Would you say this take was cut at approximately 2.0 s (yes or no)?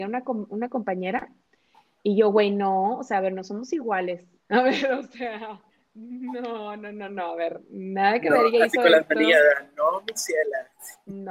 no